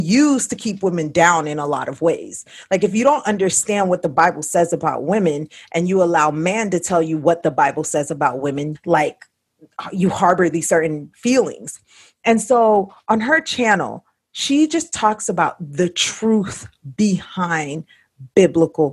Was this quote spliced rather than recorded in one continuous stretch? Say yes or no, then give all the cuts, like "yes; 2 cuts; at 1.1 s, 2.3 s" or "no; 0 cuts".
yes; 1 cut; at 8.7 s